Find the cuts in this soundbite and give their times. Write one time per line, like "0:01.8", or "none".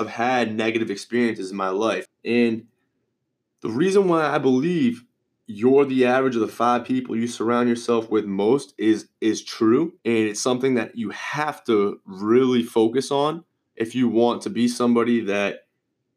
0:02.1
0:10.0